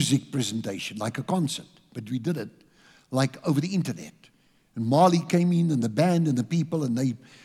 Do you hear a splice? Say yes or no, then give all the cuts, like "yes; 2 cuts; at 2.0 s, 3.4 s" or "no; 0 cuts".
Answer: no; 0 cuts